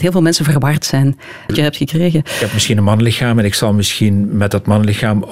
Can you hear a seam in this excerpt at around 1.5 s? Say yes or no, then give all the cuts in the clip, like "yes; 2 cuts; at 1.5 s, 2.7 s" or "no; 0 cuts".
yes; 1 cut; at 1.5 s